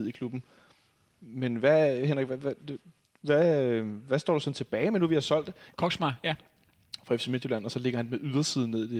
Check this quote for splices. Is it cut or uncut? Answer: cut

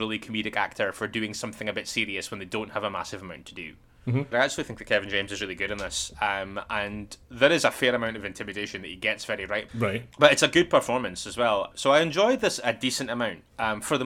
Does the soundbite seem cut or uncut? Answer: cut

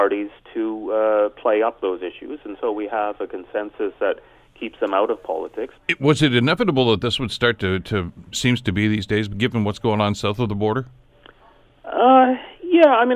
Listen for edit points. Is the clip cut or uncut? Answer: cut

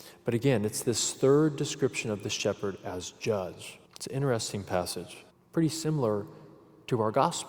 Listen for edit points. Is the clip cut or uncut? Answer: cut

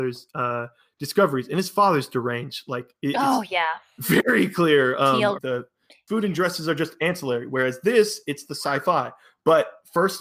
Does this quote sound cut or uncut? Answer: cut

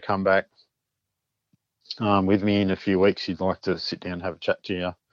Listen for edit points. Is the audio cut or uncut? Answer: uncut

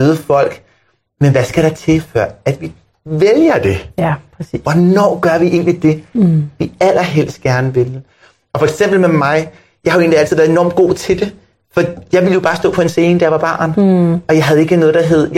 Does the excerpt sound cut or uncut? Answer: uncut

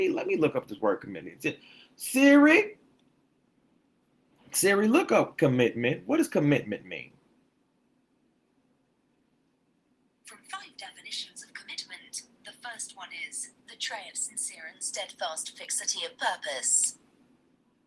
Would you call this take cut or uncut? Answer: uncut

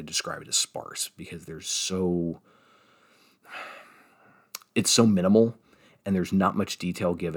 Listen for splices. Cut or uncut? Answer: uncut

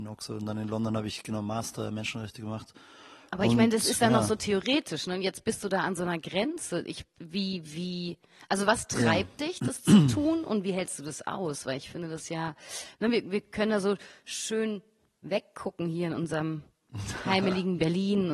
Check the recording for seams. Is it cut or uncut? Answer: uncut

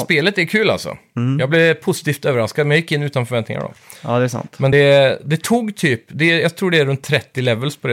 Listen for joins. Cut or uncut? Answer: uncut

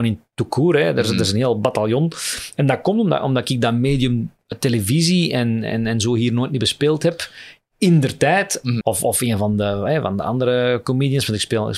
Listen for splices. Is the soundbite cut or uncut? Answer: cut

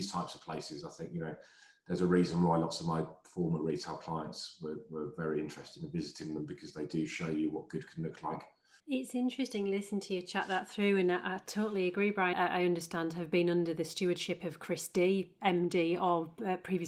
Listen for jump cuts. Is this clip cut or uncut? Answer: cut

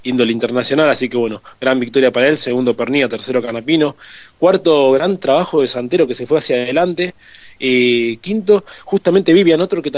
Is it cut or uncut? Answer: uncut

